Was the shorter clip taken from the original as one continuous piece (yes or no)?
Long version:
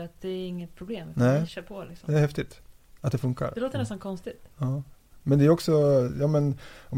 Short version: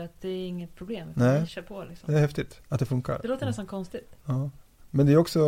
no